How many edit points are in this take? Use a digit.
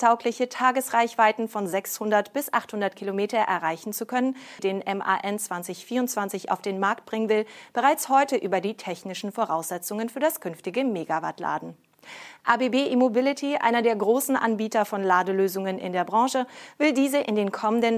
1